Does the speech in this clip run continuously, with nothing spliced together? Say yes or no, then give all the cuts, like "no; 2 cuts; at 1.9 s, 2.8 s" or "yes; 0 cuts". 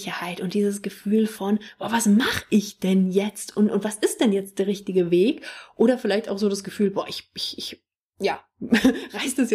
yes; 0 cuts